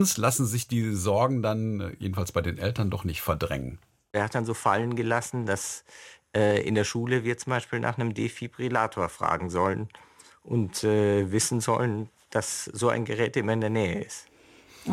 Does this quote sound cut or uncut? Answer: uncut